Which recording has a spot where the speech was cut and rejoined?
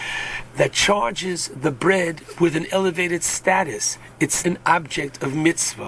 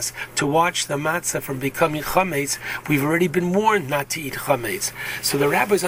first; 1 cut; at 4.4 s

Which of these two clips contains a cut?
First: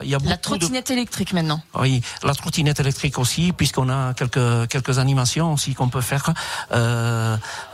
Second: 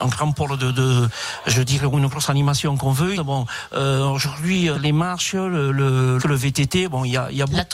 second; 3 cuts; at 3.1 s, 4.7 s, 6.2 s

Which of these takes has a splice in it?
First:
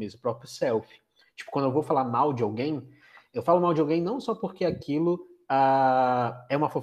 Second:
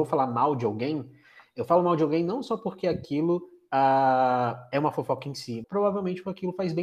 second; 1 cut; at 5.6 s

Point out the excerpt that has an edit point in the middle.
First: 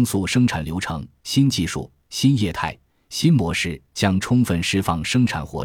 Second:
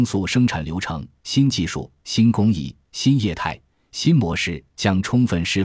first; 1 cut; at 2.0 s

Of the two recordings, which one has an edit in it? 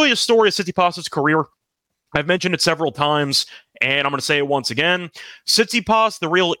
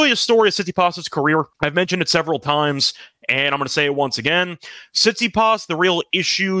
second; 1 cut; at 1.5 s

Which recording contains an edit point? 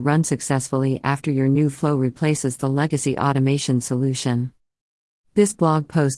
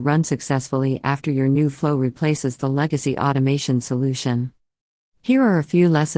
second; 1 cut; at 5.1 s

